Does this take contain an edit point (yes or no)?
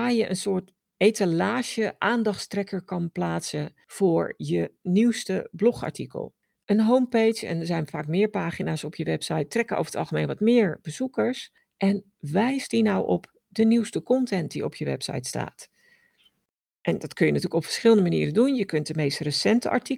no